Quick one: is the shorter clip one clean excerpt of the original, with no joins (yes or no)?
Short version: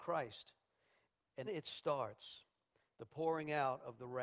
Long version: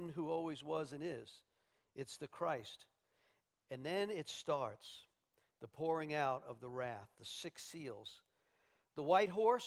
no